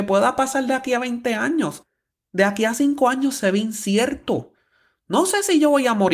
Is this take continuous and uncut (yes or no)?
yes